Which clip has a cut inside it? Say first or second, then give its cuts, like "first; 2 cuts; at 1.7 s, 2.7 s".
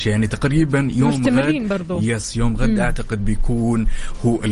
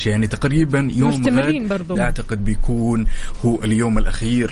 second; 1 cut; at 2.0 s